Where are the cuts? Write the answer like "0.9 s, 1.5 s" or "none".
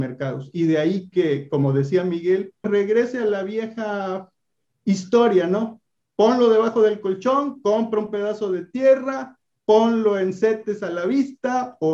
2.6 s